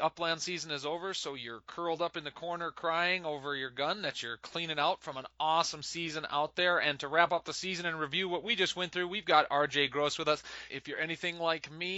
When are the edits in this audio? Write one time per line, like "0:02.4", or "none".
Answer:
0:10.7

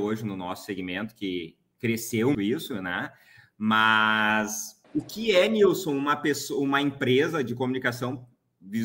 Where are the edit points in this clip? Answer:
0:02.3
0:04.8

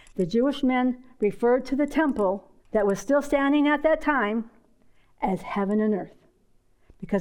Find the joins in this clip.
0:02.6

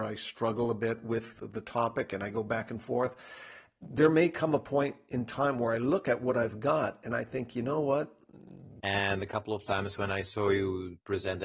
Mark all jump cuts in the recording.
0:08.8

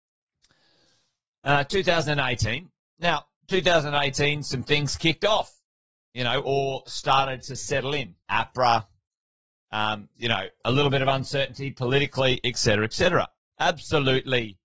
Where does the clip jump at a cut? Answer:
0:08.2
0:13.4

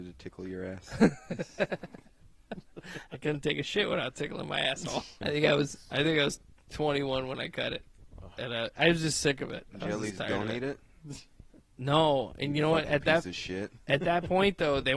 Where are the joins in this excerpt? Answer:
0:05.2

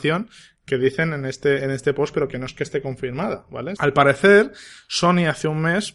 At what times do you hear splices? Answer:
0:03.8

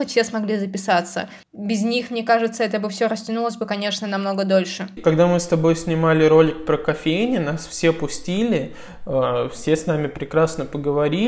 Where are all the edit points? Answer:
0:05.0

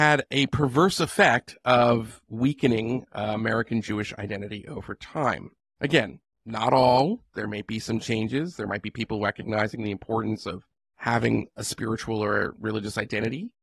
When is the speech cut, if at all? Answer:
none

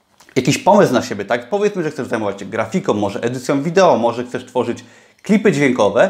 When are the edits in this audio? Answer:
none

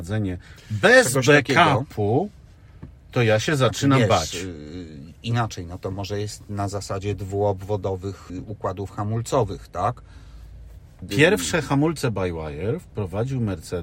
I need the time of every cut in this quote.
0:08.3
0:11.0

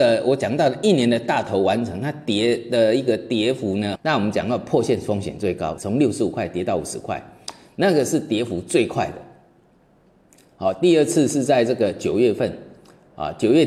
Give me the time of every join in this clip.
0:04.0
0:05.8

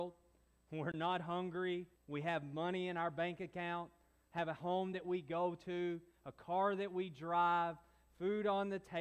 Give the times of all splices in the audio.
0:02.0

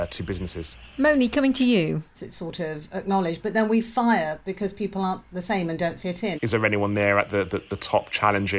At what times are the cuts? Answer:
0:02.1
0:06.3

